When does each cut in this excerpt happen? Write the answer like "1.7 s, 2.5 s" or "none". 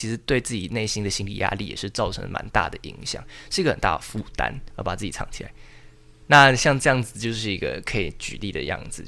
4.7 s